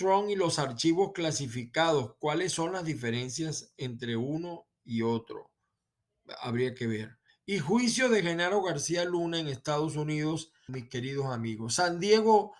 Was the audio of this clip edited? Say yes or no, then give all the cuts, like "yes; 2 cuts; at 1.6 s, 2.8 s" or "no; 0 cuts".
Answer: yes; 2 cuts; at 7.3 s, 10.7 s